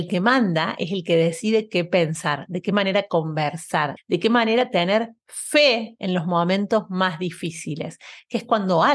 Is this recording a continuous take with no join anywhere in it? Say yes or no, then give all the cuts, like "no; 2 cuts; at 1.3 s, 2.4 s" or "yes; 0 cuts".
no; 2 cuts; at 2.5 s, 4.0 s